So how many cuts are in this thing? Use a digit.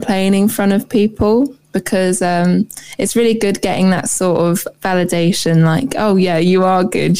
1